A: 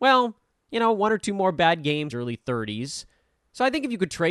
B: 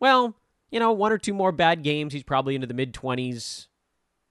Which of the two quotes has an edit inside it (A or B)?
A